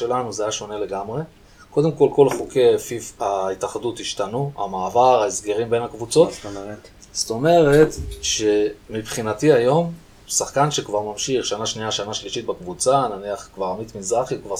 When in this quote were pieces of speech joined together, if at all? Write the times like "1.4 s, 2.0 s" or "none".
none